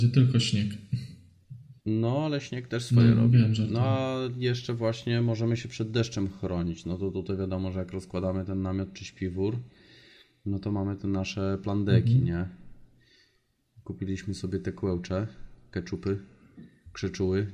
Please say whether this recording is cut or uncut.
cut